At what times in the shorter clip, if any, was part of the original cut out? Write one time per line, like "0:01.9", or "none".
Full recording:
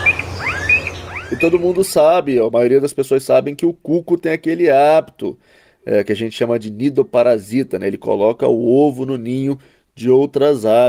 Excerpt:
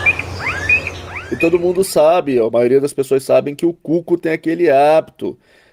none